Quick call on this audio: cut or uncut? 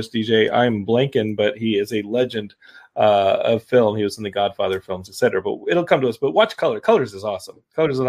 uncut